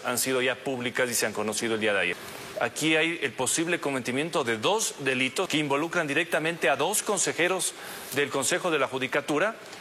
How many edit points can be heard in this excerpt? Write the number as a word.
two